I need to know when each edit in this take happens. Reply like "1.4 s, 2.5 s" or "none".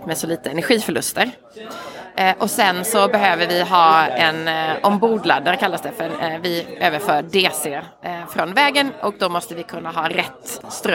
none